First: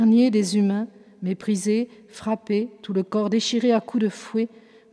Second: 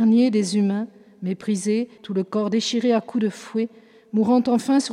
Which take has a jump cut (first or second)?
second